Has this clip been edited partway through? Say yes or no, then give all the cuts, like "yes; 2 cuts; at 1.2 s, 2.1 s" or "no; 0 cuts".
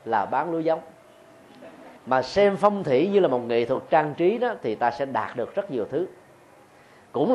yes; 1 cut; at 2.0 s